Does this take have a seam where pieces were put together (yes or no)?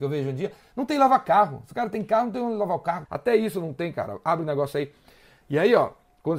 yes